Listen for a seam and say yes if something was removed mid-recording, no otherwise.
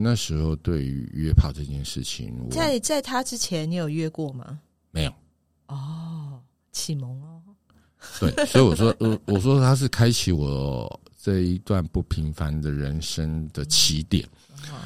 no